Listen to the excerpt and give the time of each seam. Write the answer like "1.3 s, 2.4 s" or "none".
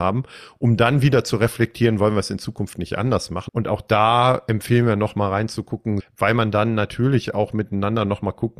3.5 s, 6.0 s